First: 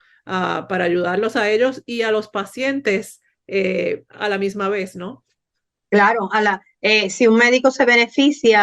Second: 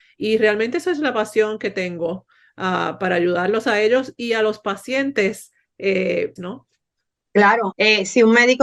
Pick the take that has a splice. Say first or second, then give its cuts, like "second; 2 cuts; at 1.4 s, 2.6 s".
second; 2 cuts; at 6.4 s, 7.7 s